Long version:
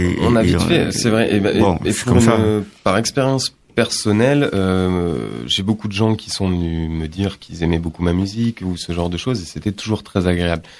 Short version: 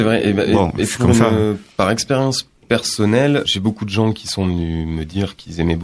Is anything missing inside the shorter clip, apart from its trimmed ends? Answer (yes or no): yes